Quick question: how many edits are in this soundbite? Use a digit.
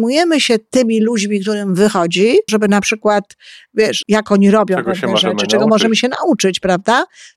2